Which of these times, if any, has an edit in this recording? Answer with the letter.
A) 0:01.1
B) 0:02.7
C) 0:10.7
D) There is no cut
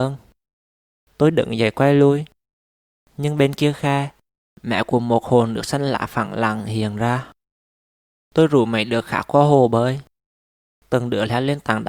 D